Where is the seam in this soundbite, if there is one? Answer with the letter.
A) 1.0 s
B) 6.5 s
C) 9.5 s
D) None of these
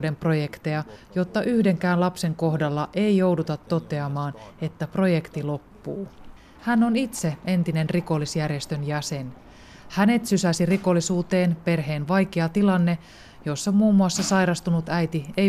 B